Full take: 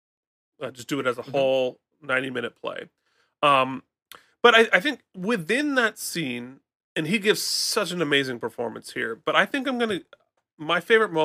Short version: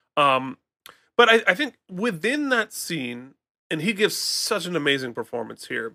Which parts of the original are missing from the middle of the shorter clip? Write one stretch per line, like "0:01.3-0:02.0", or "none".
none